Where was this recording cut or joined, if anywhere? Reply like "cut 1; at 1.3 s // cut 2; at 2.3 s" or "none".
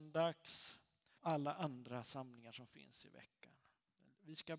cut 1; at 1.2 s